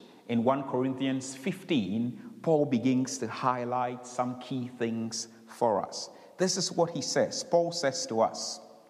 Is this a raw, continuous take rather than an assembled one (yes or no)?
yes